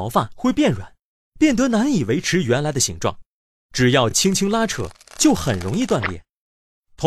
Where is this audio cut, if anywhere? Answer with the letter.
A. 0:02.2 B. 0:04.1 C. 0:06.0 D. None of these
D